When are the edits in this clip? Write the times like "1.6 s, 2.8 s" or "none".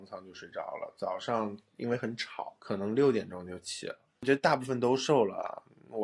none